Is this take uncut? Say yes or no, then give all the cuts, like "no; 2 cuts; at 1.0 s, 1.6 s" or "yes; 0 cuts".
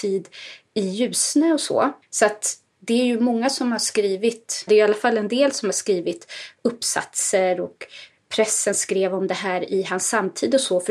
no; 2 cuts; at 2.0 s, 4.7 s